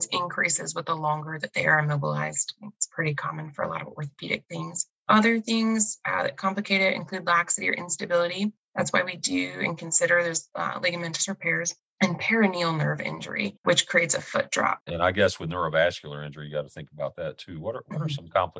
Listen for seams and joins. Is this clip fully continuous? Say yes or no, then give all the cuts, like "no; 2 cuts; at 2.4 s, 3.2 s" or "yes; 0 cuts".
no; 1 cut; at 14.8 s